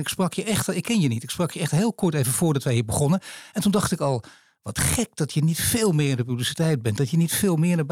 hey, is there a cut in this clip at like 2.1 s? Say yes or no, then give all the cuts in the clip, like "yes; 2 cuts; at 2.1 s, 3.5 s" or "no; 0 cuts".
no; 0 cuts